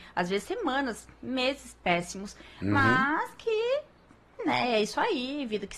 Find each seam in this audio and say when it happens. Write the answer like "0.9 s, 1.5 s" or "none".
none